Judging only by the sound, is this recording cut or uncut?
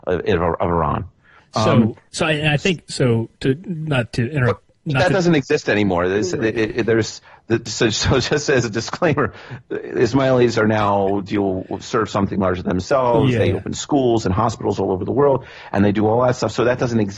cut